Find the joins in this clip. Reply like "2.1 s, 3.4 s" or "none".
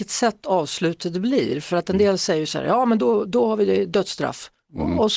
3.3 s